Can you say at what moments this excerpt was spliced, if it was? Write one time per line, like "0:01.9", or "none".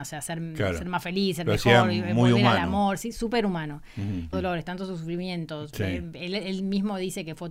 0:04.3